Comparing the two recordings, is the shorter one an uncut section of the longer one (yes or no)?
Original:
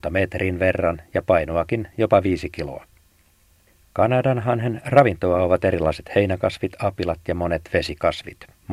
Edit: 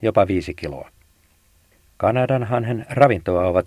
yes